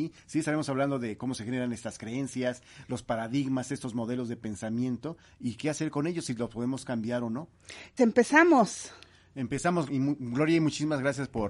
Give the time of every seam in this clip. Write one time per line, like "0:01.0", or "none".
0:08.0
0:09.9